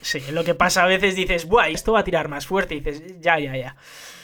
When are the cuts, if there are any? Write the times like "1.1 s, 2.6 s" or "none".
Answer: 1.7 s